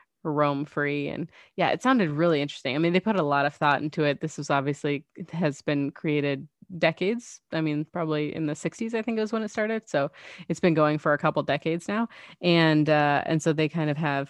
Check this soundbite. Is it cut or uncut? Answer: uncut